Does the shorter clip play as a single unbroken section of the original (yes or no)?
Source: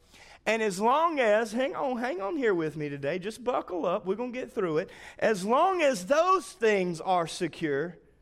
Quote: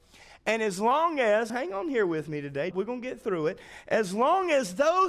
no